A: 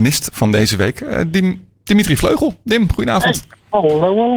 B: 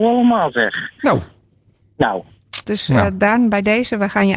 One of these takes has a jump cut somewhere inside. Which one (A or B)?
B